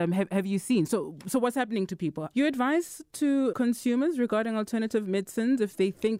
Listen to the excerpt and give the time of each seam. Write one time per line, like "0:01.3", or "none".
0:02.3
0:03.5